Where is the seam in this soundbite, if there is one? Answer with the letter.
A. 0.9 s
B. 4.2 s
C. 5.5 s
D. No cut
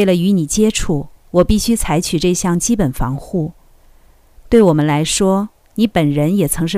D